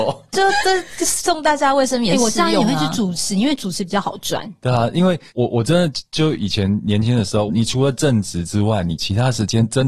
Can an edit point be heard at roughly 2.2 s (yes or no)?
no